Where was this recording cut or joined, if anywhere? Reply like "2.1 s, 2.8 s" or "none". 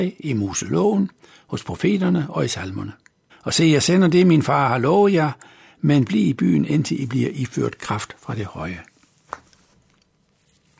3.3 s